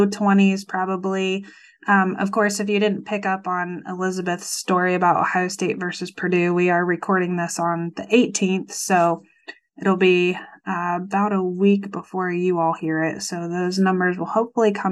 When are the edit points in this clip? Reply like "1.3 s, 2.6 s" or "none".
none